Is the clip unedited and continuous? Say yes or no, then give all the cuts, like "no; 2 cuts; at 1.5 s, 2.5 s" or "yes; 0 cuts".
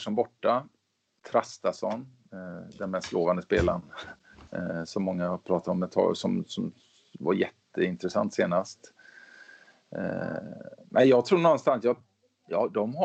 no; 1 cut; at 4.5 s